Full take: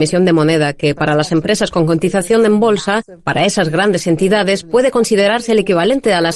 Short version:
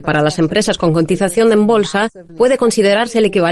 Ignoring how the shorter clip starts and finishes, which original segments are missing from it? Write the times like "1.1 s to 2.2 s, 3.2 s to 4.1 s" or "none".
3.2 s to 4.6 s